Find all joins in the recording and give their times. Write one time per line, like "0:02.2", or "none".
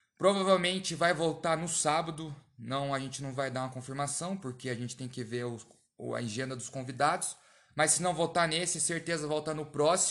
none